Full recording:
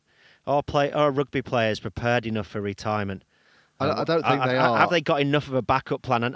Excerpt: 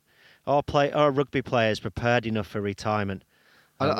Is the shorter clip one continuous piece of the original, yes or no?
yes